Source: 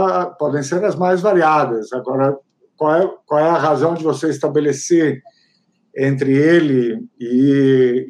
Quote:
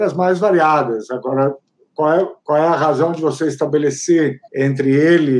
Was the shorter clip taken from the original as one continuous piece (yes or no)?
no